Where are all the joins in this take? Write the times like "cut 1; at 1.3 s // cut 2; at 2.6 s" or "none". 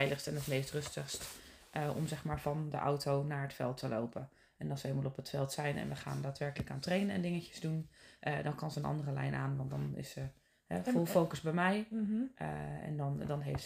none